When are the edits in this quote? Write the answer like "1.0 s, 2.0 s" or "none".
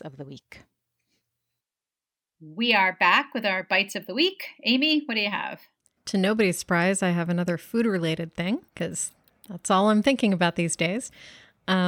6.0 s, 8.7 s